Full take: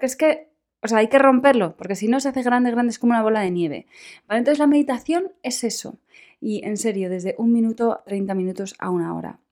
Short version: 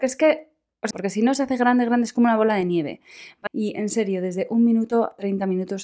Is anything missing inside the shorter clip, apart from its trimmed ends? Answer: yes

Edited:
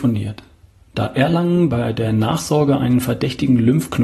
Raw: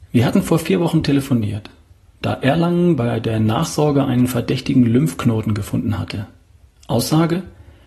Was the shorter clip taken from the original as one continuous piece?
yes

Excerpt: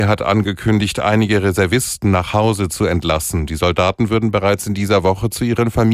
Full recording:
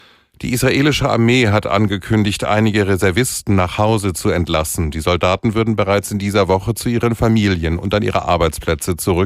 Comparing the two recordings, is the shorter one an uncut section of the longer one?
yes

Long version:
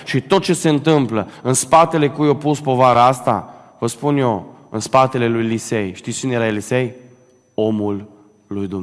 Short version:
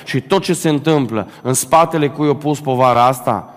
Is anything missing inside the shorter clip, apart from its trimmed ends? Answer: no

